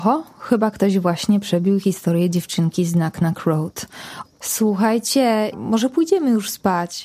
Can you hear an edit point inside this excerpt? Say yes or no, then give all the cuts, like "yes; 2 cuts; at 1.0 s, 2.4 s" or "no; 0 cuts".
yes; 2 cuts; at 4.2 s, 5.5 s